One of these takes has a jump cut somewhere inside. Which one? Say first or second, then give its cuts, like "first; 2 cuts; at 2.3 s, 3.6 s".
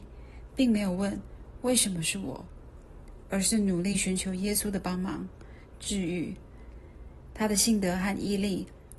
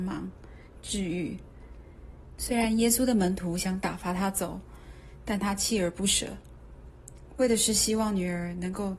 second; 1 cut; at 2.4 s